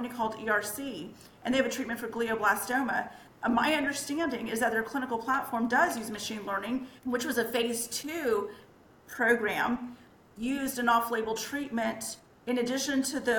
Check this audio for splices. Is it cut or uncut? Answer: cut